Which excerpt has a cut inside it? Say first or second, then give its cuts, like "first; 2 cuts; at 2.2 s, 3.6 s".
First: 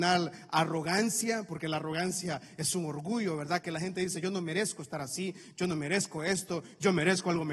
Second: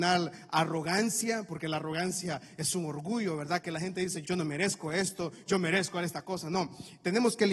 second; 2 cuts; at 4.2 s, 5.5 s